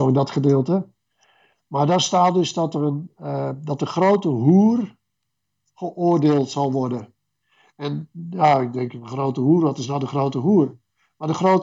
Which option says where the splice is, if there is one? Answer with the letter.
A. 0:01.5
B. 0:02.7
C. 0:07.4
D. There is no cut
D